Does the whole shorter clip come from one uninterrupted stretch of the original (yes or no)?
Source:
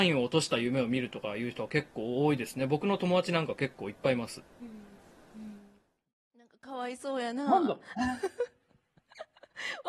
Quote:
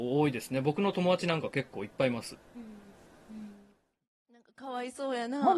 yes